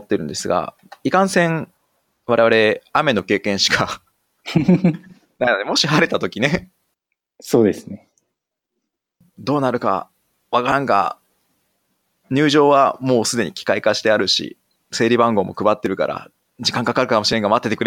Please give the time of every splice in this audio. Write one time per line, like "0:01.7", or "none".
none

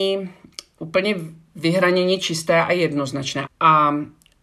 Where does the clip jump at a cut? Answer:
0:03.5

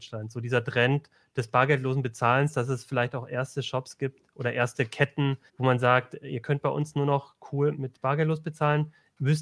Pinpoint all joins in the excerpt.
0:05.5
0:07.7

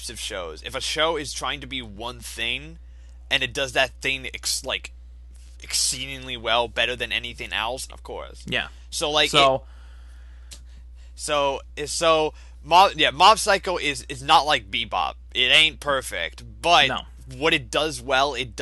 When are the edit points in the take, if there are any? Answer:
0:07.9

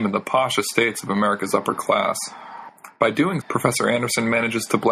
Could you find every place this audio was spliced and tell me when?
0:03.4

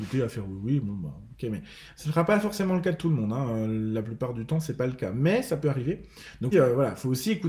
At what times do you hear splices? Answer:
0:06.5

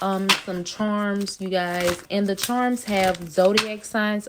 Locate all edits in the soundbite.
0:02.1

